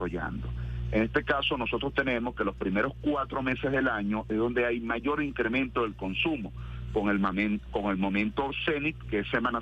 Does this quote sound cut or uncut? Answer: uncut